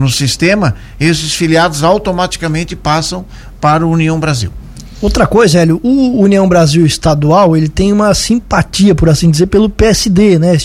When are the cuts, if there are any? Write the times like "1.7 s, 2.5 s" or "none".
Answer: none